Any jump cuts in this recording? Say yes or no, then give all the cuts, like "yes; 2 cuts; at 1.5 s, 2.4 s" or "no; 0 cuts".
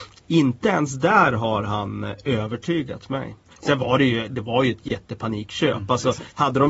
yes; 1 cut; at 4.3 s